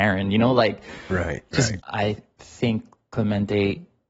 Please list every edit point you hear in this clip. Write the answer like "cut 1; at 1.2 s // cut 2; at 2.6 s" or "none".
cut 1; at 1.8 s